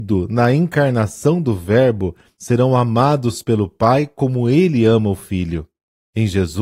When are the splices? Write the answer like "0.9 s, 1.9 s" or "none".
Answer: 2.3 s